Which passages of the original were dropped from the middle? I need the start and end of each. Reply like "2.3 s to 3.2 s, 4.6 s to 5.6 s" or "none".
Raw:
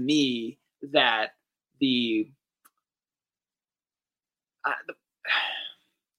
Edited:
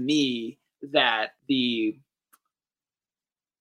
1.4 s to 1.7 s

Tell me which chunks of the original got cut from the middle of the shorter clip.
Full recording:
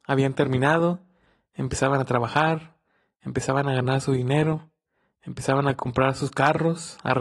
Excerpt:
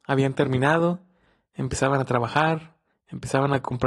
2.9 s to 5.1 s

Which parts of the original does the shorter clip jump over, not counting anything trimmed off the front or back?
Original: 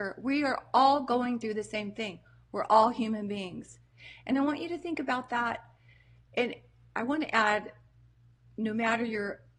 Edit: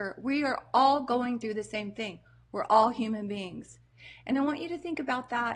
none

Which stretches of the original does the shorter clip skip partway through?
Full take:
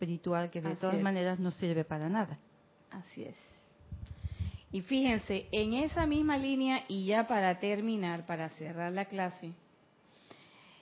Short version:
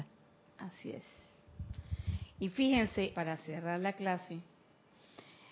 5.5 s to 8.3 s

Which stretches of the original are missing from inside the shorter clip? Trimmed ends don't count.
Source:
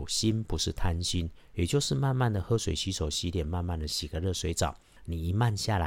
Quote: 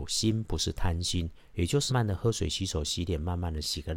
1.9 s to 2.1 s

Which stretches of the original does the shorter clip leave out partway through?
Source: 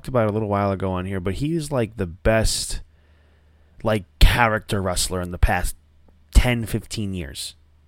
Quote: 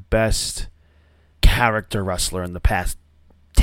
3.5 s to 4.1 s

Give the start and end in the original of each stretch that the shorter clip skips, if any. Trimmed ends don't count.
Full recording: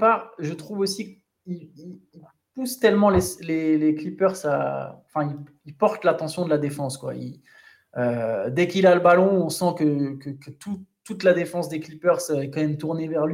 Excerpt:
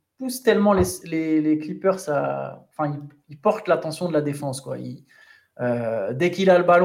none

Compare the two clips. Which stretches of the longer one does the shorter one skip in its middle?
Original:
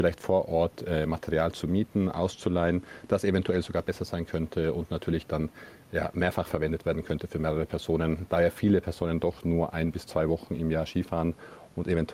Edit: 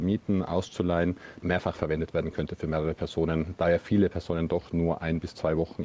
3.1 s to 6.1 s

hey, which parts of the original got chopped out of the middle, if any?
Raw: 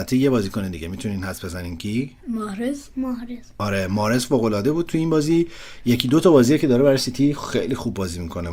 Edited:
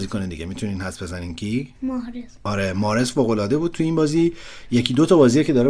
2.2 s to 2.9 s

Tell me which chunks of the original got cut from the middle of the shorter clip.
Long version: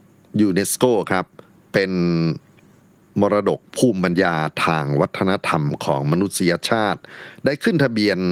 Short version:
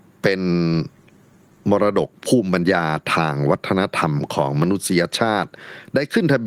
none

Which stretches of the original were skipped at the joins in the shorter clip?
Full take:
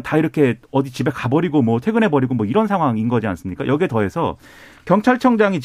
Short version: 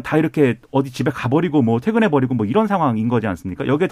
none

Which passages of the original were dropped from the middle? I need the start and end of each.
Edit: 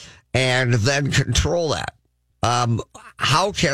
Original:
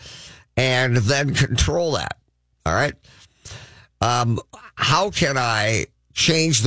2.5 s to 3.9 s

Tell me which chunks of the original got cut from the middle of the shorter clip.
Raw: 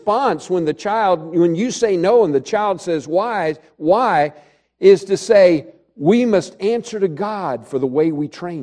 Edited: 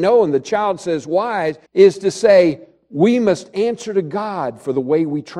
3.7 s to 4.7 s

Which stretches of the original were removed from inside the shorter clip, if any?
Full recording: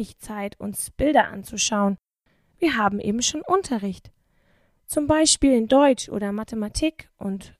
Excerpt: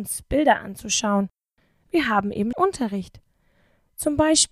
3.2 s to 3.4 s

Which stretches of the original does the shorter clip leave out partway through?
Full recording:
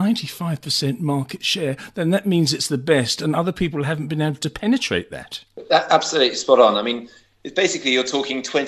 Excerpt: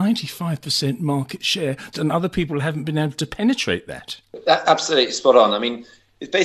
1.9 s to 3.2 s

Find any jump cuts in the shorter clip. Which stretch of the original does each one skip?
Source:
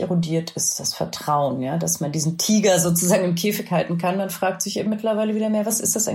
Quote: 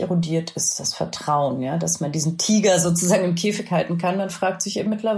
none

